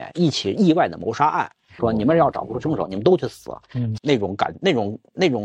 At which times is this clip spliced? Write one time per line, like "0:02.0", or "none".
0:01.8
0:04.0